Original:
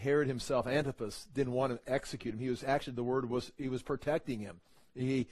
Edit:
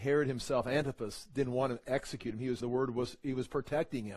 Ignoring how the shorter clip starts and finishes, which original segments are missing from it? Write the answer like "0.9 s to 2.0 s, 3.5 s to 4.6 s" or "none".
2.6 s to 3.0 s

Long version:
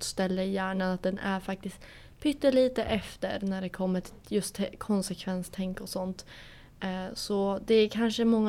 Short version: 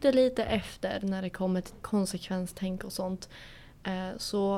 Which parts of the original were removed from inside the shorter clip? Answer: 4.2 s to 4.8 s

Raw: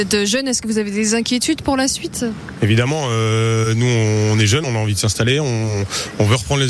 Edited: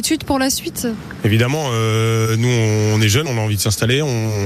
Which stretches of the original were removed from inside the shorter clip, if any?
none

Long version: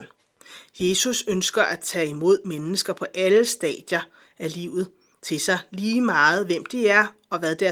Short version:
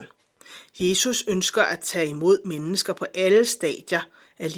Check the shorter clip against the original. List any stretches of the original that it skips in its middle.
none

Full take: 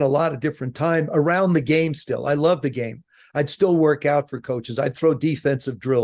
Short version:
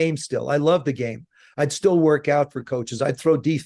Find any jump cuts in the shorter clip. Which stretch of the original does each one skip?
none

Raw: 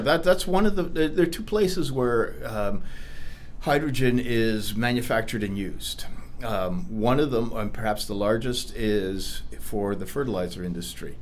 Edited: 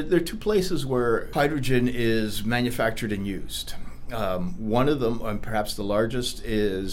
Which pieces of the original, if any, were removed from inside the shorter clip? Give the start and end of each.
2.4 s to 3.6 s

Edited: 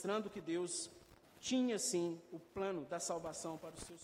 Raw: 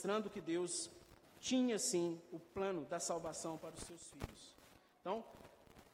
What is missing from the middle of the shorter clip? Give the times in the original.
none

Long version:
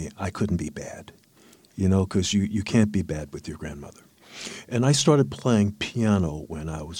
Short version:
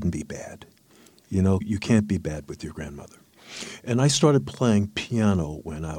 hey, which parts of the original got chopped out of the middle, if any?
2.1 s to 2.4 s

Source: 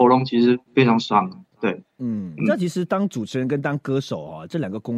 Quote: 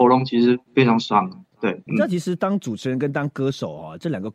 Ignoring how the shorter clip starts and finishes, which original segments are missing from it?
1.9 s to 2.4 s

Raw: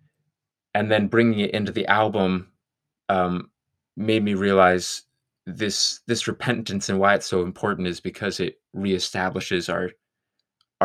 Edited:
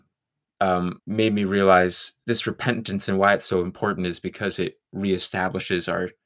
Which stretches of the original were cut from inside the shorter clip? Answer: 3.5 s to 3.9 s, 5.1 s to 6.0 s

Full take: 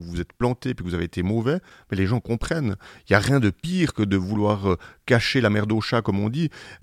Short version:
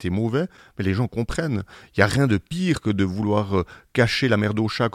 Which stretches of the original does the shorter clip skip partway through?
none

